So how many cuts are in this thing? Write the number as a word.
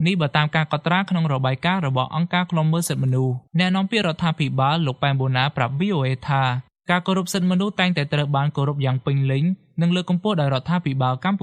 one